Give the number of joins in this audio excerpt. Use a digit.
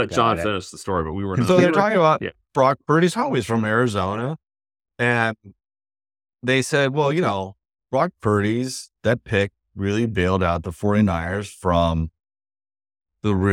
0